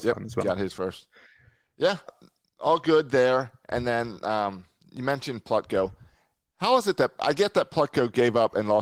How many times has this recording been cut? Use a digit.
1